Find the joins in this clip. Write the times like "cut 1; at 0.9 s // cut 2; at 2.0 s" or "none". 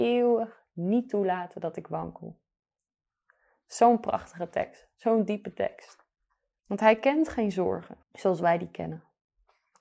cut 1; at 6.6 s // cut 2; at 8.0 s